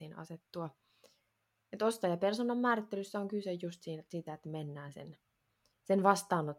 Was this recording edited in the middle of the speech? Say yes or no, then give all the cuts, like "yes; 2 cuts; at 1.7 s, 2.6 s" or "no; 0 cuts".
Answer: no; 0 cuts